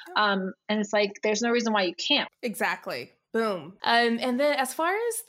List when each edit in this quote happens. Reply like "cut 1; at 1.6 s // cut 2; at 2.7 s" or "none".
cut 1; at 2.3 s // cut 2; at 3.8 s